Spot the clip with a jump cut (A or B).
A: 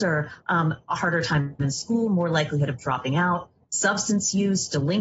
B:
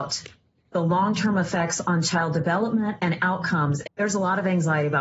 B